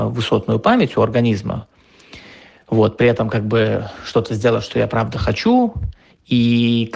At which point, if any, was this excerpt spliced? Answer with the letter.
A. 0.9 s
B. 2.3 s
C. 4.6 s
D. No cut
D